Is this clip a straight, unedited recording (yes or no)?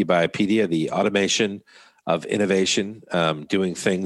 yes